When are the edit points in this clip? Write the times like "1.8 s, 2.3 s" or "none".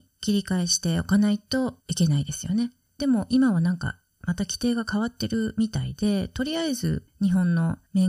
3.0 s